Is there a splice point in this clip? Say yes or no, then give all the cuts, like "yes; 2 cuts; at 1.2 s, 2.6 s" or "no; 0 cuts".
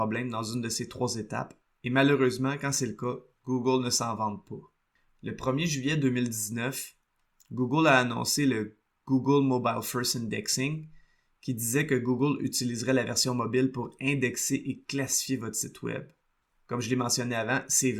no; 0 cuts